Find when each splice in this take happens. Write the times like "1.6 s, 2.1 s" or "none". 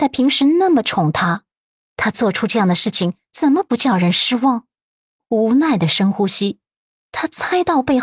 5.2 s